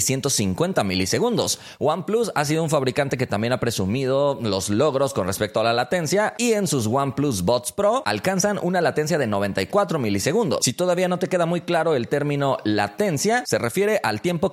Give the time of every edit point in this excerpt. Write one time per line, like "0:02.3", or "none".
0:10.6